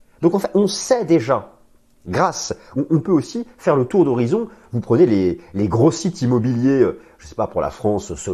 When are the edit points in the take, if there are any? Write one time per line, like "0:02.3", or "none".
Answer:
none